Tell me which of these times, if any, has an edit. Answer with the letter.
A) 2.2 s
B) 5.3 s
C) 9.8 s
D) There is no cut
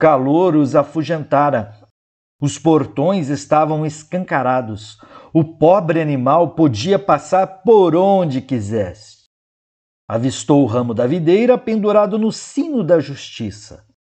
A